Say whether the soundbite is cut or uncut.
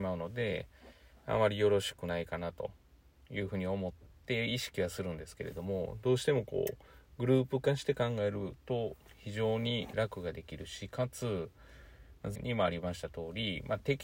cut